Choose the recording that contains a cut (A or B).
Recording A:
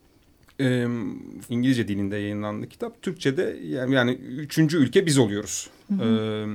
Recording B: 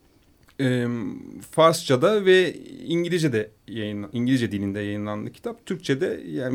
A